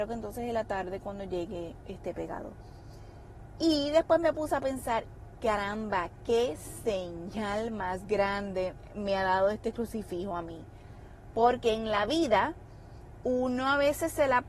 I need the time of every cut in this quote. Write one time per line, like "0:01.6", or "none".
none